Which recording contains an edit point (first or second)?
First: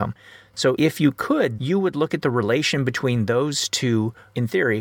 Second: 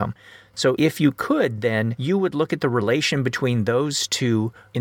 first